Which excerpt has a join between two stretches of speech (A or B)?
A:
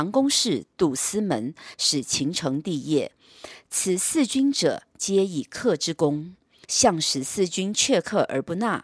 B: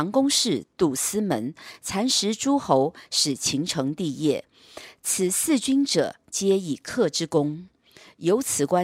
A